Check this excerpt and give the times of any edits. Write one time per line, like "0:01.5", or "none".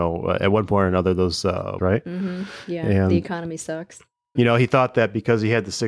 0:01.8
0:04.4